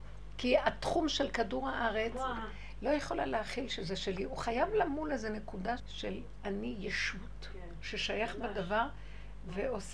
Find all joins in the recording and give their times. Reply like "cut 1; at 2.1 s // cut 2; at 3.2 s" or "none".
cut 1; at 2.8 s // cut 2; at 5.8 s